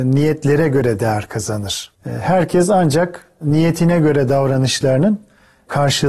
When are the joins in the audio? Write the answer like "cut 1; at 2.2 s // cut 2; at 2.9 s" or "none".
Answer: cut 1; at 2.0 s

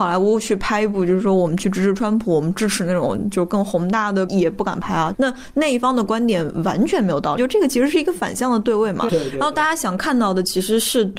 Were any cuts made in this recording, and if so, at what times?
cut 1; at 4.3 s // cut 2; at 7.4 s // cut 3; at 9.1 s

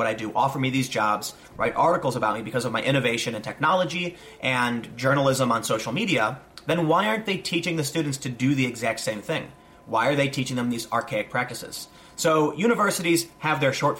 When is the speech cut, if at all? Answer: none

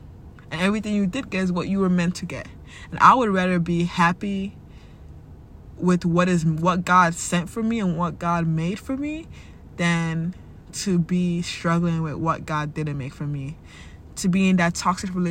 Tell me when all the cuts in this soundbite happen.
none

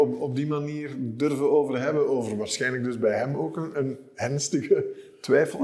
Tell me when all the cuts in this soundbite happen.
cut 1; at 3.7 s

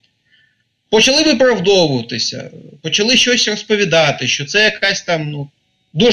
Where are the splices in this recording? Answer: none

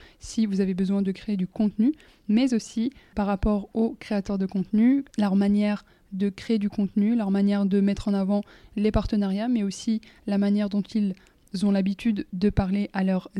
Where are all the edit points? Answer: cut 1; at 3.1 s

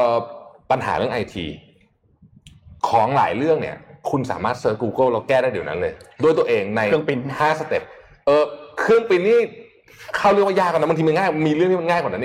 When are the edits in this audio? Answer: cut 1; at 2.8 s

